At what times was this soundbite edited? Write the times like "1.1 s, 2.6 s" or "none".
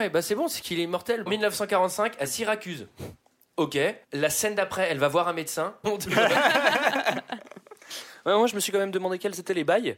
1.3 s, 4.0 s, 5.8 s